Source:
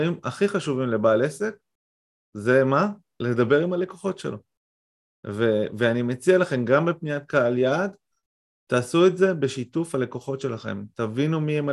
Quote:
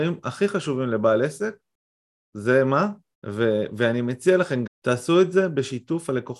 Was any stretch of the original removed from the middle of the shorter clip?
yes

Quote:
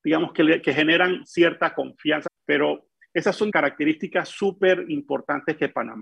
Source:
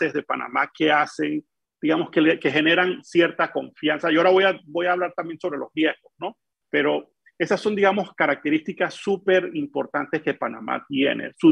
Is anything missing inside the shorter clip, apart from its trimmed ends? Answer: yes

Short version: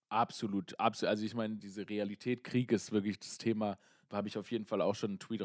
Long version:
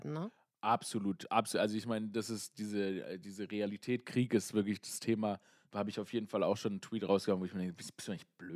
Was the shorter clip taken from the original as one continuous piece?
no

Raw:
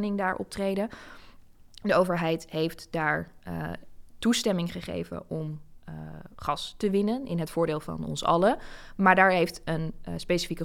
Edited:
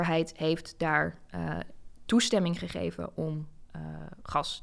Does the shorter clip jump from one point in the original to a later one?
no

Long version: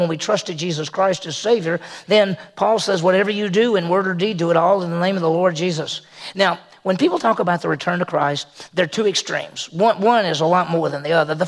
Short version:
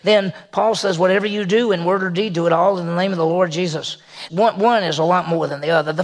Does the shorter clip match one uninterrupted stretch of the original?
no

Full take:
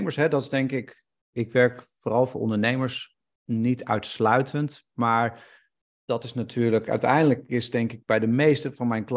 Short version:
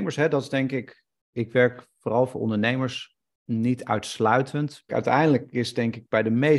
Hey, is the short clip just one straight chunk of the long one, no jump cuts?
no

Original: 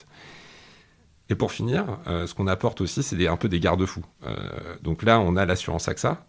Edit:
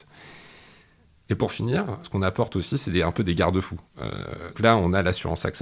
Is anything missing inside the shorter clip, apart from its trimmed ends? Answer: yes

